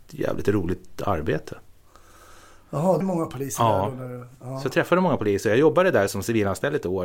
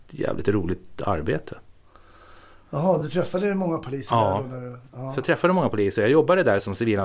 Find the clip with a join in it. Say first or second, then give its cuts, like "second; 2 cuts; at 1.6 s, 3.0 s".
first; 1 cut; at 3.0 s